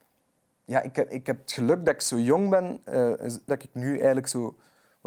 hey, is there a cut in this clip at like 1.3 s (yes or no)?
no